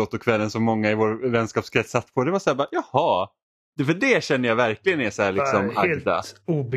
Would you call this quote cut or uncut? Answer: uncut